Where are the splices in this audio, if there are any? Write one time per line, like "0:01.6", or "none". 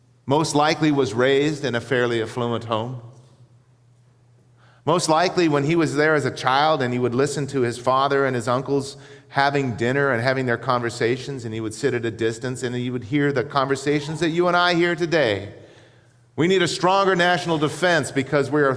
none